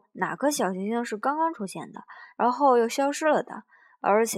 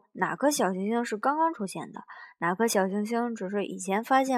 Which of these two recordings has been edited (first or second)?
first